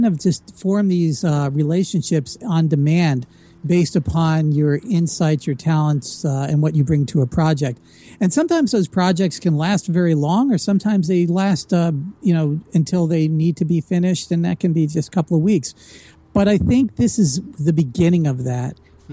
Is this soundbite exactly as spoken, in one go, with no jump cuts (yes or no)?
yes